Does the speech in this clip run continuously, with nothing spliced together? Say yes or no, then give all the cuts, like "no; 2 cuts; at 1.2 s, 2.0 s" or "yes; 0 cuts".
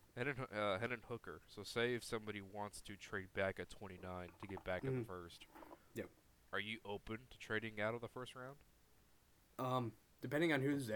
yes; 0 cuts